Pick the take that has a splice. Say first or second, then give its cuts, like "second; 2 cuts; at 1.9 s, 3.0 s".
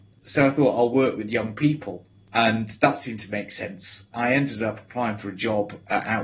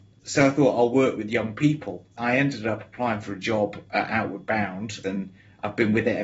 second; 2 cuts; at 2.1 s, 5.0 s